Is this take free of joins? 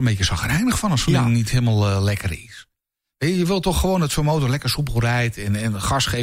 yes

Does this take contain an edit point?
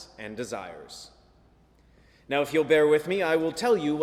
no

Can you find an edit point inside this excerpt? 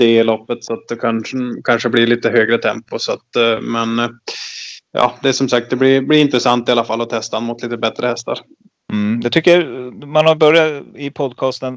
no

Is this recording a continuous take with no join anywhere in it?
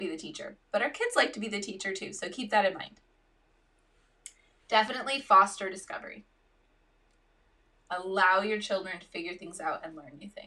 yes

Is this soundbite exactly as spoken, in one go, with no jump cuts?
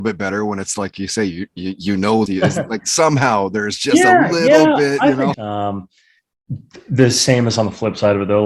no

